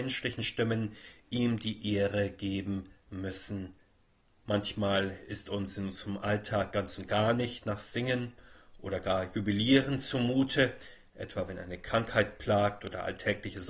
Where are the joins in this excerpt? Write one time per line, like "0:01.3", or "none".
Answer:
0:04.3